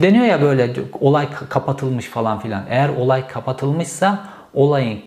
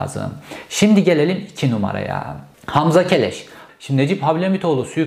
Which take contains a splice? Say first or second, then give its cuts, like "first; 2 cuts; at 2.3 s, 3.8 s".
second; 2 cuts; at 2.5 s, 3.7 s